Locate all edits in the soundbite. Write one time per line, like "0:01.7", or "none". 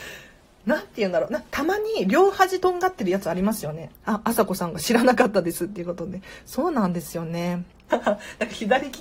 0:03.9
0:07.9